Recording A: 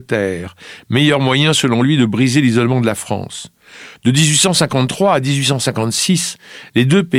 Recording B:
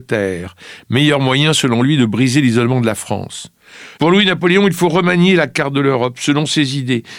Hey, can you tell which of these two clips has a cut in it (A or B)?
B